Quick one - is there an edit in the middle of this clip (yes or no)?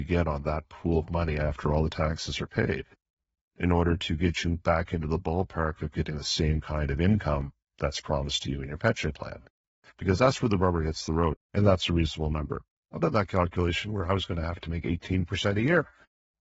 yes